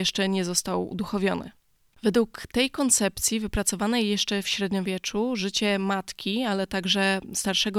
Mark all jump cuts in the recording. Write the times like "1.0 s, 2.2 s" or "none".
1.9 s